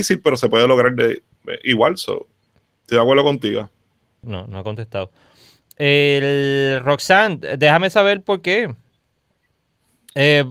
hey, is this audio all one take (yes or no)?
no